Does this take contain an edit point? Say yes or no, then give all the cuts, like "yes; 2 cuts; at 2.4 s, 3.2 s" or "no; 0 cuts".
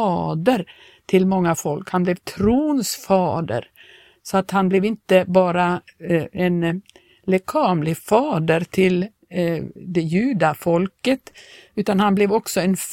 no; 0 cuts